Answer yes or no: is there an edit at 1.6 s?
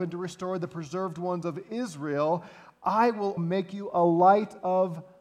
no